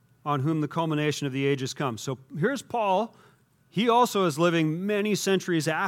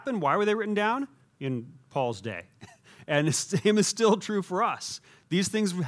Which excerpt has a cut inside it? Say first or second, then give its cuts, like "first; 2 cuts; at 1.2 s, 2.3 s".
second; 1 cut; at 1.2 s